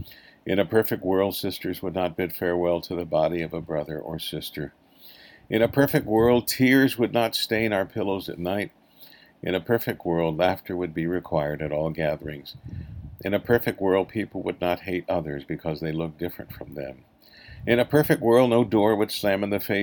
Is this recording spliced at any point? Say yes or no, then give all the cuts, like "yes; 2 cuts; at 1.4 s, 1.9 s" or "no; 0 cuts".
no; 0 cuts